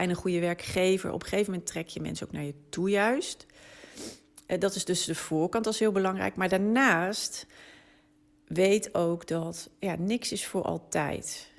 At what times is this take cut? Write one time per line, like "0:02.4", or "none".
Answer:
none